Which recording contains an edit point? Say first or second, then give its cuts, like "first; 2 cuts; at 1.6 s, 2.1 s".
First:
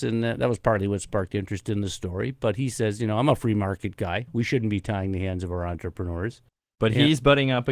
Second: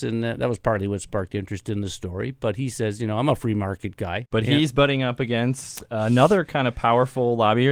second; 1 cut; at 4.3 s